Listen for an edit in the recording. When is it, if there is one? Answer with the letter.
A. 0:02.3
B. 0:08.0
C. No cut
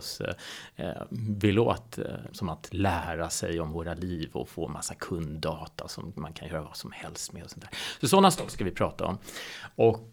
A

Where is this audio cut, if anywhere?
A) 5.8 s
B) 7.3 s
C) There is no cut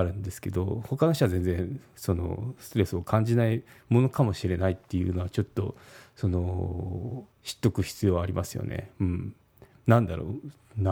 B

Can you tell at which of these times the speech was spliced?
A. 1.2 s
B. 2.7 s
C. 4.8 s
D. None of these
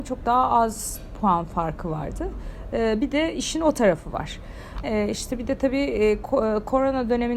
C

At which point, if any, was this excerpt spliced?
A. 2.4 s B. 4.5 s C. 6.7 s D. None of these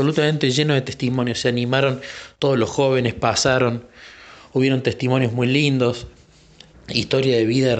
C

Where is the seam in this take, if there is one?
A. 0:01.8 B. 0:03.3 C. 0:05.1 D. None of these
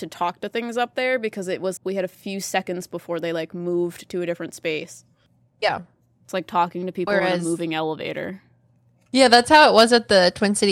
A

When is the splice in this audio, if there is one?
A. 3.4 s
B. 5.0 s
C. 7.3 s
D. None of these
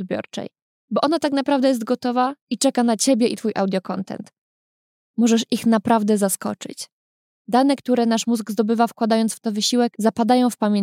B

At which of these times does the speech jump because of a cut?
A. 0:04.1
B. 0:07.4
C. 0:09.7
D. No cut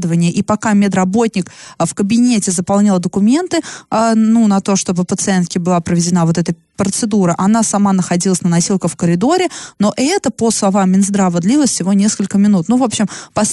D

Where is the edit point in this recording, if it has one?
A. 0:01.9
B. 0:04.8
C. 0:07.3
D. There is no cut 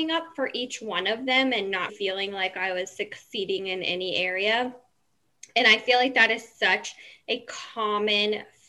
A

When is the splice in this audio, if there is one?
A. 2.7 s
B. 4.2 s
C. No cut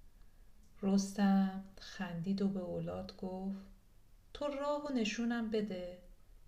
B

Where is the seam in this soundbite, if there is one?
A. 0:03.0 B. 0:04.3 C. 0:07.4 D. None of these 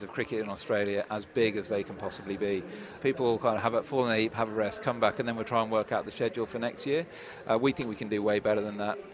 A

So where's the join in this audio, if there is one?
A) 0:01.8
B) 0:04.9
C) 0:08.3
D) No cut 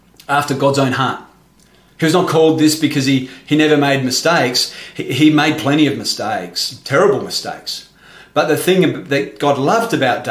D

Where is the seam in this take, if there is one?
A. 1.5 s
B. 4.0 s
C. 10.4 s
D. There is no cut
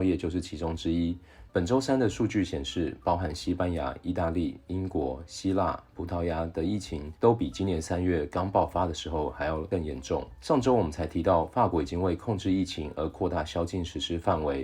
A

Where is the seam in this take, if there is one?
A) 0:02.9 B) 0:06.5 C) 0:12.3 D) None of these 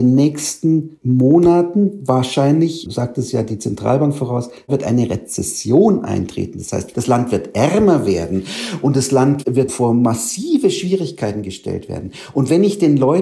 A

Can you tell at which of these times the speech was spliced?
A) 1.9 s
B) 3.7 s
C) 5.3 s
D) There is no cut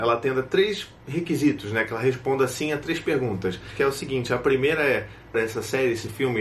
C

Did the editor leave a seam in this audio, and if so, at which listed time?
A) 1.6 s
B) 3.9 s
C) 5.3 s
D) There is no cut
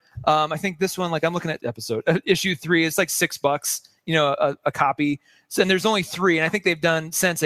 A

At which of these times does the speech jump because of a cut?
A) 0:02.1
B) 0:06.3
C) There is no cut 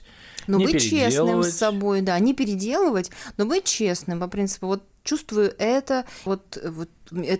B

